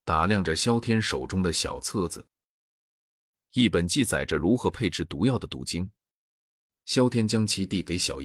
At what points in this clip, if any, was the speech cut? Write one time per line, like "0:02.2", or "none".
none